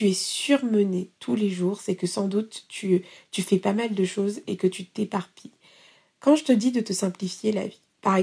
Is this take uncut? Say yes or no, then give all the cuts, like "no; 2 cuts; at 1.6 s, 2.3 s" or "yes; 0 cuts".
yes; 0 cuts